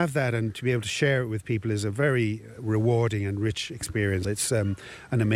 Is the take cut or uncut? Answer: cut